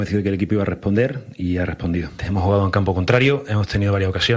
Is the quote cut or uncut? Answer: cut